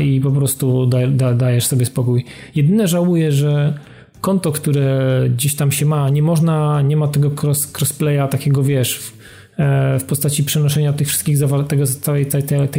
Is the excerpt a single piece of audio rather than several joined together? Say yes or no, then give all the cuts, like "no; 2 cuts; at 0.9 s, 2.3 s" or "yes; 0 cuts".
yes; 0 cuts